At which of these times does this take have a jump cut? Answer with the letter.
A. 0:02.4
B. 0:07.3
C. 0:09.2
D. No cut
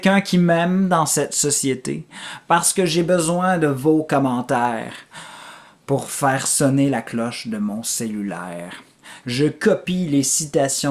C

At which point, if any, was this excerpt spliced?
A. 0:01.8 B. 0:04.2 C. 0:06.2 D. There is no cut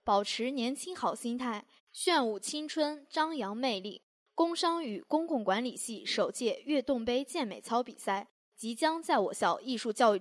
A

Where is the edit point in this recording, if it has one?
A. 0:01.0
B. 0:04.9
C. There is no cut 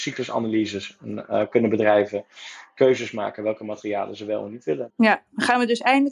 B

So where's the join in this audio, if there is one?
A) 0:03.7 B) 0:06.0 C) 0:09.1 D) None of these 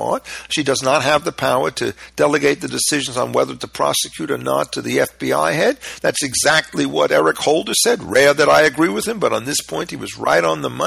B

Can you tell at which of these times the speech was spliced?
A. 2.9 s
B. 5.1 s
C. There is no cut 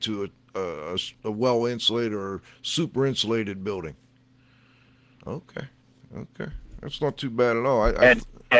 B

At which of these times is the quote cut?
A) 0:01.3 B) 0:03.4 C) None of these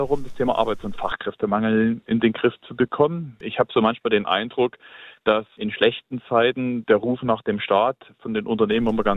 B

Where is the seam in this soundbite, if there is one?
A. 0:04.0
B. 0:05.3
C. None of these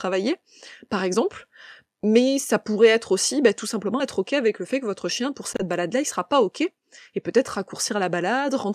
C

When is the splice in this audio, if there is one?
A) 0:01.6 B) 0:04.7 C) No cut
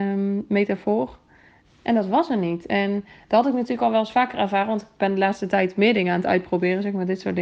A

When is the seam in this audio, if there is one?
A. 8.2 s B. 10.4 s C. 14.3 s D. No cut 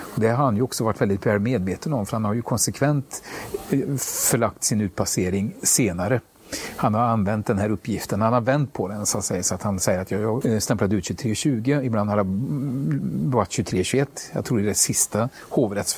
B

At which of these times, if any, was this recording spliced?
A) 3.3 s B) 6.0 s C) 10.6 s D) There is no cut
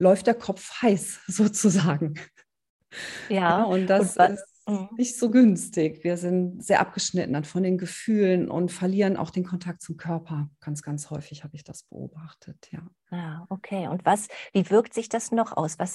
D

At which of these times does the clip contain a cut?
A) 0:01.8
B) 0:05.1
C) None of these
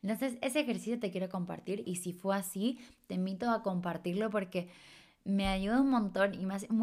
A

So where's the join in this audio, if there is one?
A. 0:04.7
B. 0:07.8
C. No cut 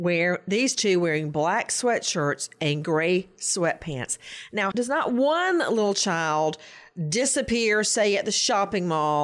A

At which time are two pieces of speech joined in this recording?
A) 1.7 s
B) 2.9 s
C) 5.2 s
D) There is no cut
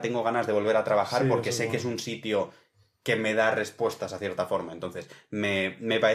D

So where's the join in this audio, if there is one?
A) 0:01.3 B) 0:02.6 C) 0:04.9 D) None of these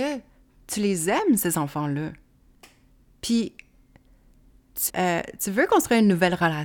C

